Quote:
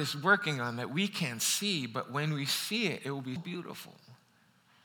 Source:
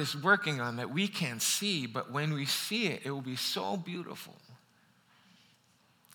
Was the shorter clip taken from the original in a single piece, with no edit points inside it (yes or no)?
no